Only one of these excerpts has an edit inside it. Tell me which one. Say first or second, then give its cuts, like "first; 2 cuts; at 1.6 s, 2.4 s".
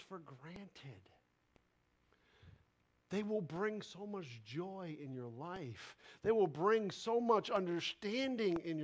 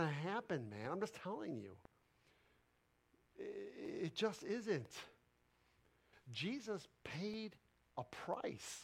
second; 1 cut; at 6.1 s